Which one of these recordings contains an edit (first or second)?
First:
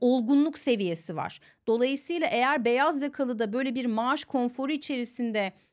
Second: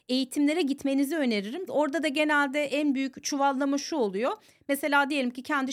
second